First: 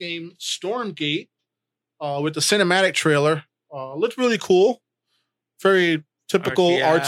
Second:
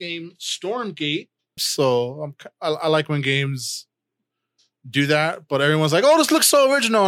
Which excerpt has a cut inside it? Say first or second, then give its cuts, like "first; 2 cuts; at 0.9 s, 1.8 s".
second; 1 cut; at 1.6 s